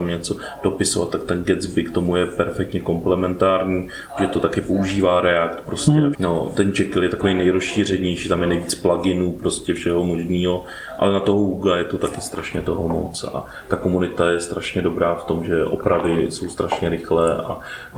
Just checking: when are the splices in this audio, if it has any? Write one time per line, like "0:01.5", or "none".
0:06.1